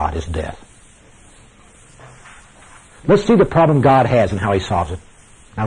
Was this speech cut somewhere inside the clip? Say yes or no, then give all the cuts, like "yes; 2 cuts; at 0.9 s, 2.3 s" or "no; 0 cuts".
yes; 1 cut; at 2.9 s